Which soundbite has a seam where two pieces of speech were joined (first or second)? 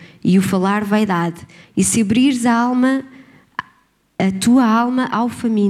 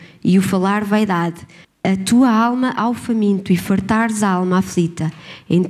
second